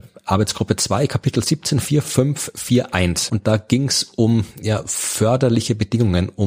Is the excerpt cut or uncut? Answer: cut